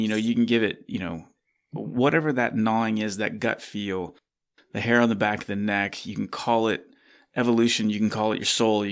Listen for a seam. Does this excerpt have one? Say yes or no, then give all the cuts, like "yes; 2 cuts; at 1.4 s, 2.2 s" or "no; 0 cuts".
no; 0 cuts